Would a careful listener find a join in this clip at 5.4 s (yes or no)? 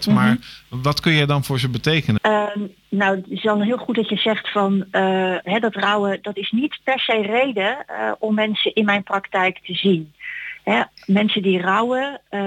yes